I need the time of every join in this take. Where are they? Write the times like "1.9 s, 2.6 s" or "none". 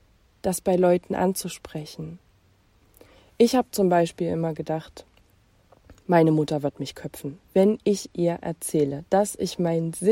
none